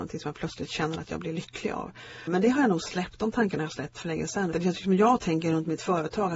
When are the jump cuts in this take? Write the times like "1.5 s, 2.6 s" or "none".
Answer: 2.3 s, 4.5 s